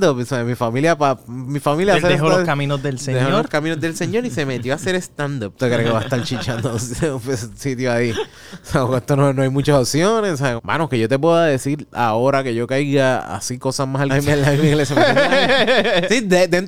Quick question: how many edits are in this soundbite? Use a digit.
3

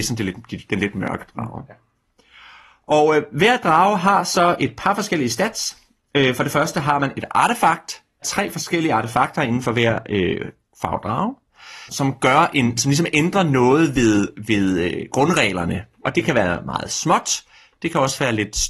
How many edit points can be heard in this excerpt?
2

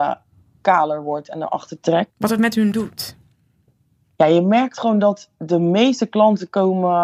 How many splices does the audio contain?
1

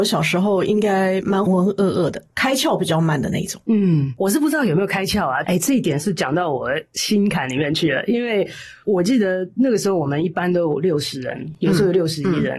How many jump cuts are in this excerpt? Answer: 2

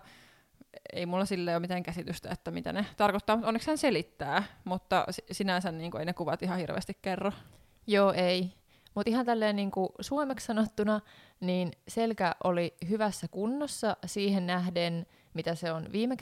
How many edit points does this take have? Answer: 0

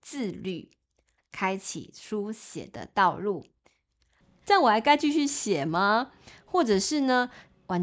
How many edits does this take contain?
2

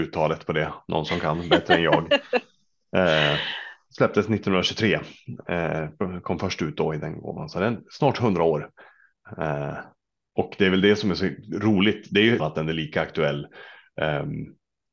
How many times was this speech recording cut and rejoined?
1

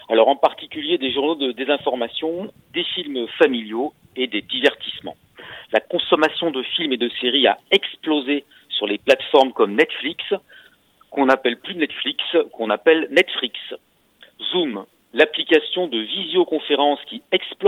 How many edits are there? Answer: 0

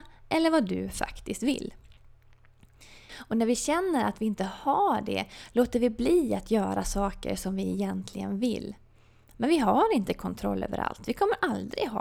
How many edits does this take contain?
1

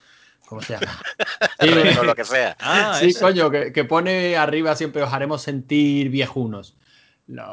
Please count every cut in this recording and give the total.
0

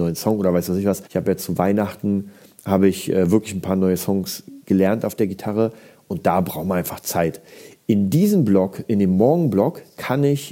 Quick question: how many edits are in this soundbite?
1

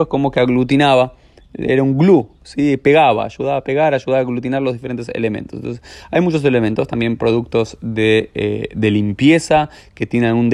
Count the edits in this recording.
0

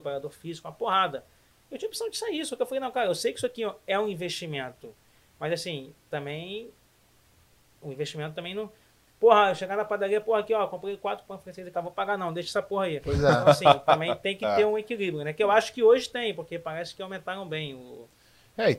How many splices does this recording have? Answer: 1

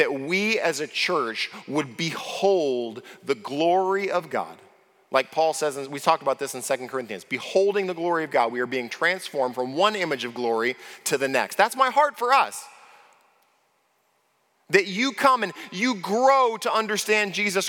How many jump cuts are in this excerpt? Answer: 0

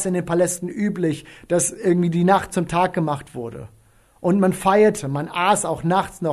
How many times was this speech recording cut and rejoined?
0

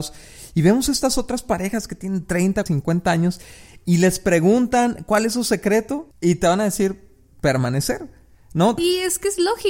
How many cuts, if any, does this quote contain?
3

